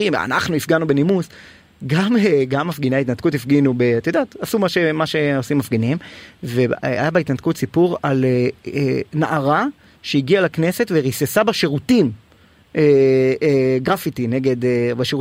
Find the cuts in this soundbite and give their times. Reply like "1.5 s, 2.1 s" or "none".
none